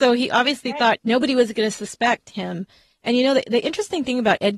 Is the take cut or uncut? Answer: cut